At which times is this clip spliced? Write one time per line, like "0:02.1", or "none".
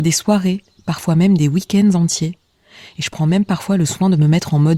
none

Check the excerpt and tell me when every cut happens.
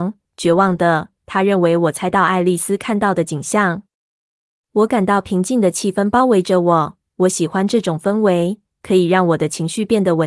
0:01.2

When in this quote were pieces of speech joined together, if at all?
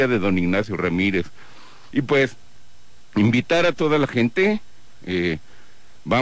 0:01.9

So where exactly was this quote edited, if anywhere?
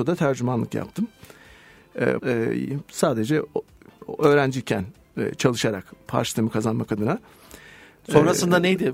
0:02.2

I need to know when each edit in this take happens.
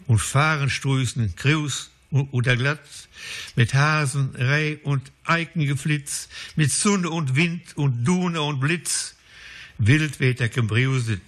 none

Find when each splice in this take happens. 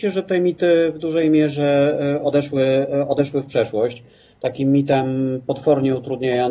none

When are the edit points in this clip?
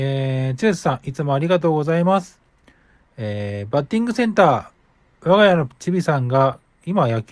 none

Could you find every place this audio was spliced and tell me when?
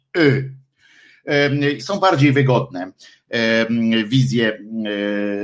0:01.8

